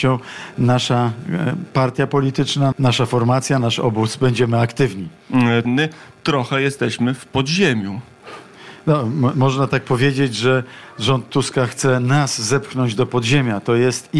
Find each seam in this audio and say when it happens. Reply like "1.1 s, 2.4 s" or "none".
2.7 s, 5.6 s